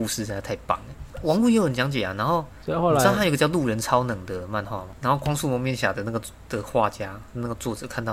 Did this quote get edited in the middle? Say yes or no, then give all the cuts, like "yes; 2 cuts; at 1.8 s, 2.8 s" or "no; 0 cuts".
yes; 2 cuts; at 1.1 s, 5.0 s